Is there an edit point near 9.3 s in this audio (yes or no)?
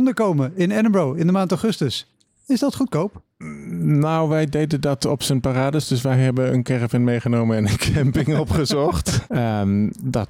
yes